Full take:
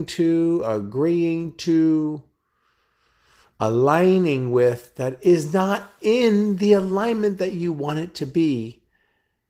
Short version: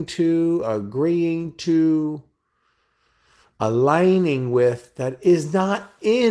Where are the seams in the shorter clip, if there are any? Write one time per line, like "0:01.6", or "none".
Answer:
none